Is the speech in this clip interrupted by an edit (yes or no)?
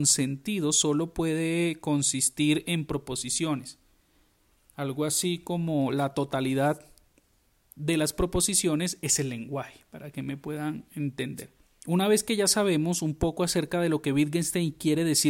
no